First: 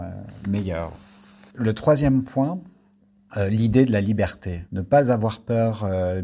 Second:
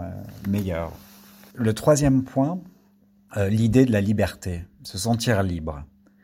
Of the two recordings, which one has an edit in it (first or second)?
first